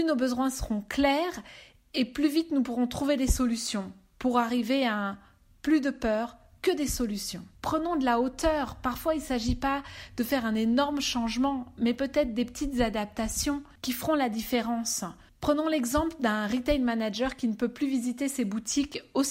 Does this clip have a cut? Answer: no; 0 cuts

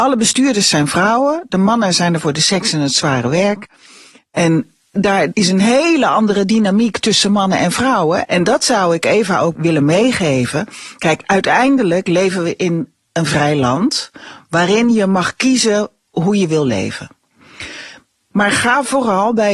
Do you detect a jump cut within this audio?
yes; 2 cuts; at 8.3 s, 18.3 s

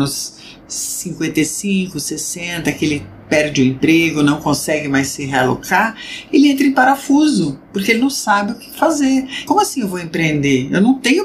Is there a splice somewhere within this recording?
yes; 1 cut; at 9.5 s

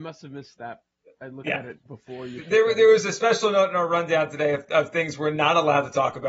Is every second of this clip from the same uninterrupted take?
no; 1 cut; at 1.9 s

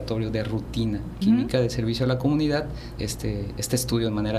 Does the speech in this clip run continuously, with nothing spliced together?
no; 2 cuts; at 1.2 s, 3.0 s

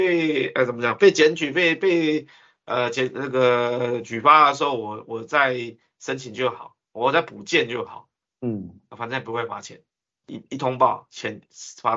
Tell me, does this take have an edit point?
yes; 1 cut; at 10.1 s

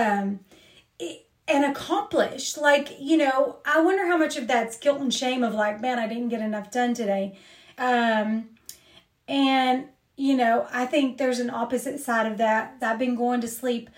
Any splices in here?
yes; 2 cuts; at 7.7 s, 12.8 s

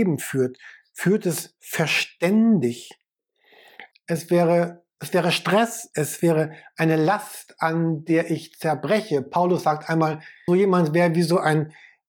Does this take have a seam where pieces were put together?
yes; 2 cuts; at 3.9 s, 10.5 s

